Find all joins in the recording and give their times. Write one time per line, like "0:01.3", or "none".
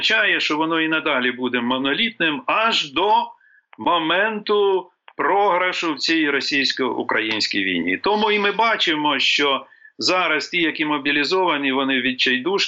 none